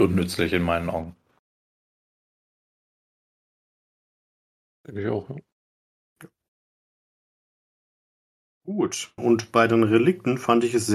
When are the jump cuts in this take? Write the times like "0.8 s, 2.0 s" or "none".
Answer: 9.2 s